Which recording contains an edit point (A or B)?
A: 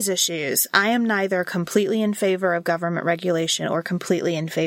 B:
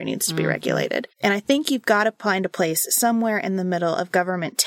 B